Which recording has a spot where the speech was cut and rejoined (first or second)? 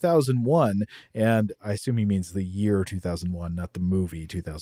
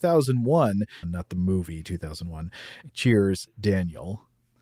second